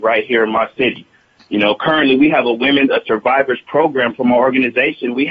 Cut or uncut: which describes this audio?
uncut